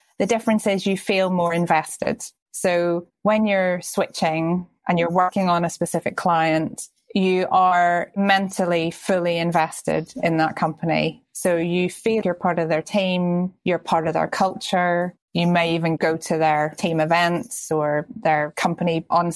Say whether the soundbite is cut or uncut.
cut